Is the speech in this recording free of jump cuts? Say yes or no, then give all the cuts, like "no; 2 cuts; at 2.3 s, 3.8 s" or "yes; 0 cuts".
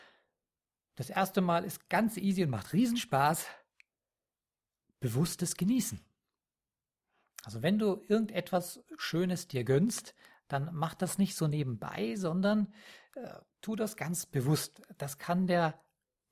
yes; 0 cuts